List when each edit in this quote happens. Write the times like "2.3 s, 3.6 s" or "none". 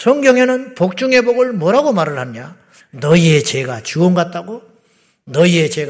2.8 s